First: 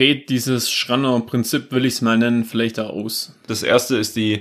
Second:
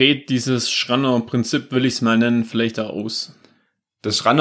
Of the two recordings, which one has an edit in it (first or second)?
first